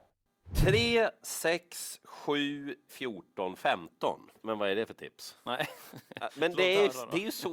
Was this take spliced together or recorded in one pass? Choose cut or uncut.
cut